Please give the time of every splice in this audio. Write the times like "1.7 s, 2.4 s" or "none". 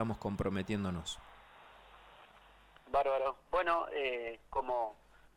none